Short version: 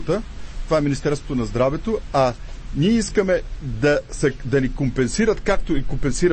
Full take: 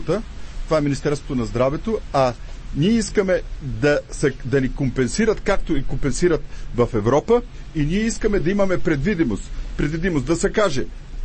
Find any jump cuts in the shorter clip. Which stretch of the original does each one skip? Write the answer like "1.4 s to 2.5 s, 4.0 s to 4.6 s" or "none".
none